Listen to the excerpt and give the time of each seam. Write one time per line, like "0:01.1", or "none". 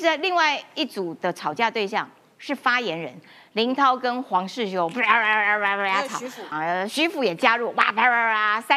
0:06.5

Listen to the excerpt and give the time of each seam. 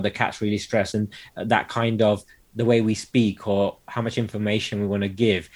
0:00.9

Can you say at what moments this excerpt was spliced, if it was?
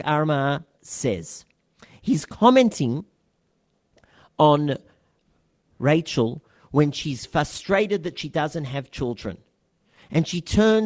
0:05.7

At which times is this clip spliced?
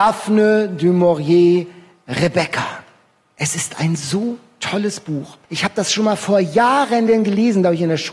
0:05.4

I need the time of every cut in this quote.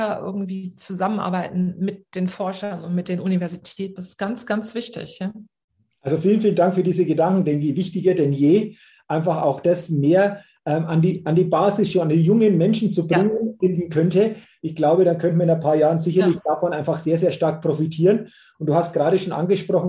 0:04.0
0:13.6

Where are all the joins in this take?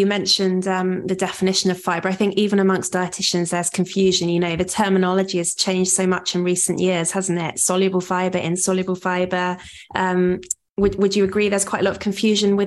0:09.9

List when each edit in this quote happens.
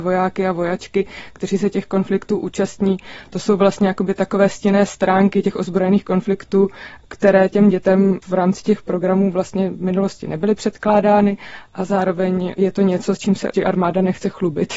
0:13.5

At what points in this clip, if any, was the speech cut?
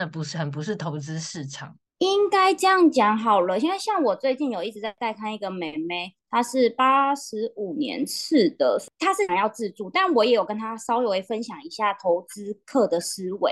none

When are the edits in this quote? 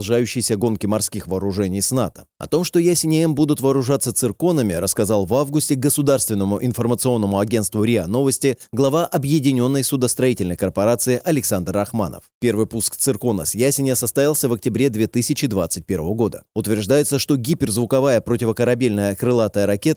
0:12.3
0:16.5

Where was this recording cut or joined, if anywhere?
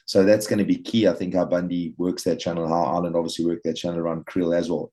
none

